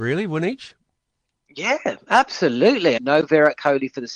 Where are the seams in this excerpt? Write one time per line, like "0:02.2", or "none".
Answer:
0:03.0

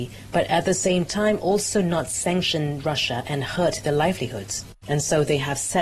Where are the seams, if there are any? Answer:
0:04.8

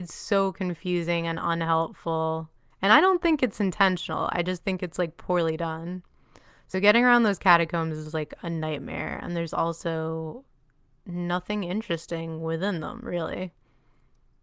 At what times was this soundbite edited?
none

